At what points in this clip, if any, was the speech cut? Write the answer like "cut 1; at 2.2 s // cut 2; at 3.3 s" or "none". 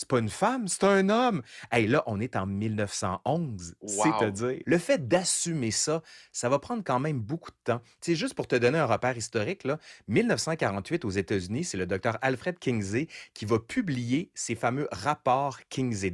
cut 1; at 4.6 s